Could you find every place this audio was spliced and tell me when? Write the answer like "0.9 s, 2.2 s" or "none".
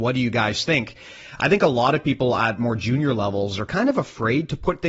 1.4 s